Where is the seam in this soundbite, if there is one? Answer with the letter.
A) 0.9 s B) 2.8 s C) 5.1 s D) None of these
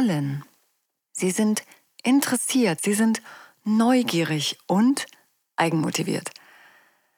B